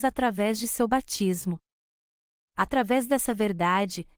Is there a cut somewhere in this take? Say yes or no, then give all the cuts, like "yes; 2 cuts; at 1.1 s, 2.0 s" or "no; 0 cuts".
no; 0 cuts